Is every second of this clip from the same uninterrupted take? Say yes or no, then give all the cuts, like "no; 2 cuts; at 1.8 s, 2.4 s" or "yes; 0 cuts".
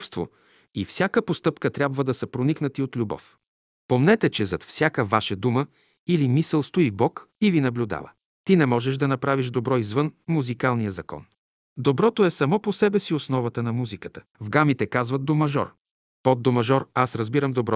no; 2 cuts; at 8.2 s, 14.3 s